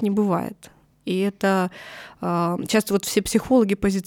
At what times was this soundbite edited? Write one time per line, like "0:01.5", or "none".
0:00.9